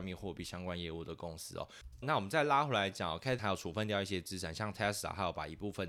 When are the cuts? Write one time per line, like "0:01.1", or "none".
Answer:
0:02.0
0:03.4